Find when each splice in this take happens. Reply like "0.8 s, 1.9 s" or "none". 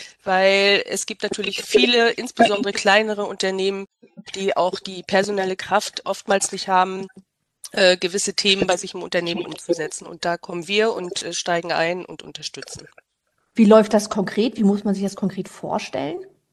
none